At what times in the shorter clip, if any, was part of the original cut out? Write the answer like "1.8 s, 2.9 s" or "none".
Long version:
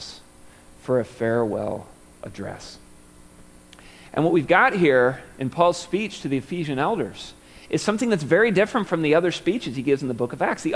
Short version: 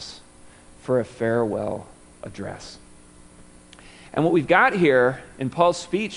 none

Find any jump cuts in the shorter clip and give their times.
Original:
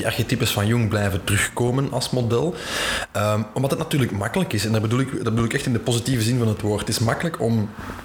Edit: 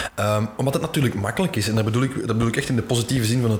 none

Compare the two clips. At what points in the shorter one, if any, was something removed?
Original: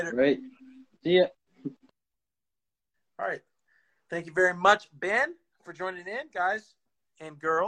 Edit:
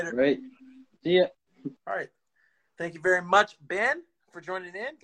1.8 s

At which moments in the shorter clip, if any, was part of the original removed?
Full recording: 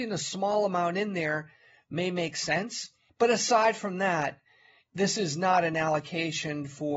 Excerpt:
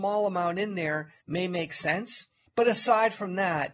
1.2 s

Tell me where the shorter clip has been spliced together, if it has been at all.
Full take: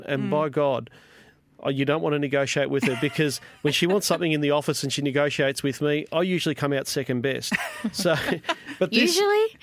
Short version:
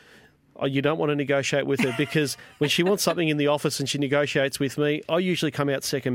none

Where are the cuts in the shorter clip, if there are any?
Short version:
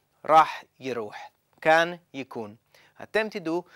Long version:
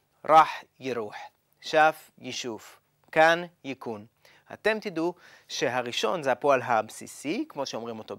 1.5 s

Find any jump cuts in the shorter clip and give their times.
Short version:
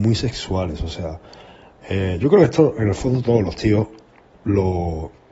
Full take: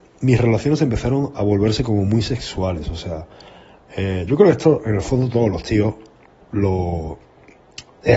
none

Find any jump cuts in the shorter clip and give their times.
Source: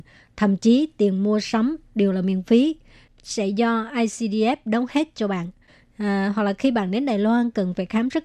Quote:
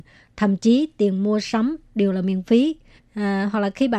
3.0 s

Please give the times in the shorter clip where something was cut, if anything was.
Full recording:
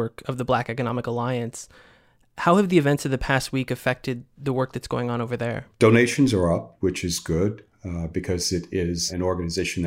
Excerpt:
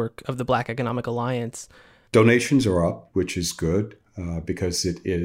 2.1 s

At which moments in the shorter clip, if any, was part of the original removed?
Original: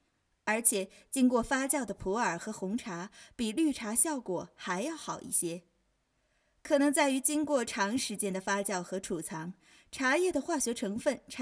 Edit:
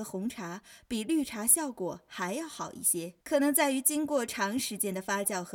3.2 s

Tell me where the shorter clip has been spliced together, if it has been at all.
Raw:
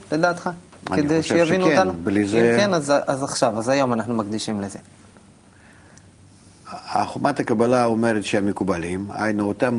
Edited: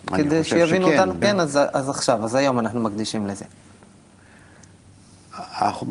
1.2 s

